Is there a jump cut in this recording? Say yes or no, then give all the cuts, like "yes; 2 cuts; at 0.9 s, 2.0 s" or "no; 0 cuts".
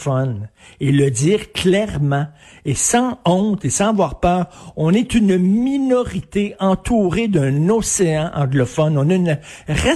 no; 0 cuts